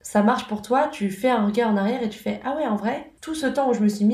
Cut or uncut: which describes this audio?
uncut